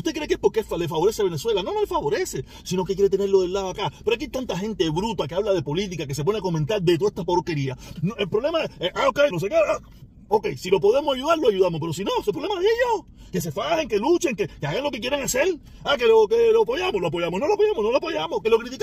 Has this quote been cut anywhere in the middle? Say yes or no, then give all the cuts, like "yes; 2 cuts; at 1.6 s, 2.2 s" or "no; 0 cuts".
yes; 2 cuts; at 8.0 s, 9.3 s